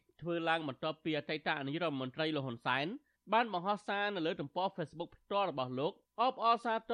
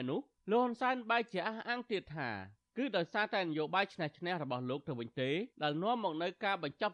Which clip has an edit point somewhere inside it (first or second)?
second